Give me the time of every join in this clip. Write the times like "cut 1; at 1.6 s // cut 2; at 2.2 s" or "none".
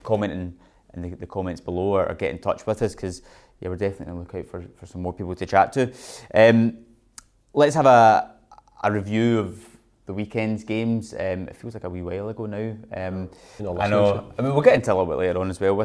cut 1; at 13.6 s